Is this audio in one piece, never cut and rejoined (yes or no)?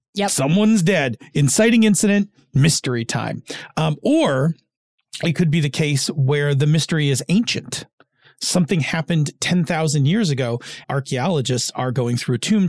no